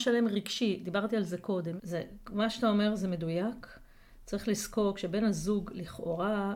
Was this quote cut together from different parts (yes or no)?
yes